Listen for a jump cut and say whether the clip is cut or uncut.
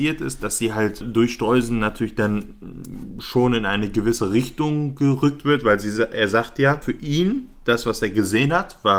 uncut